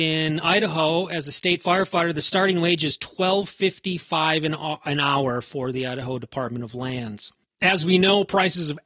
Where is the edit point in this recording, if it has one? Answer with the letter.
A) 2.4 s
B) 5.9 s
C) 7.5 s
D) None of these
D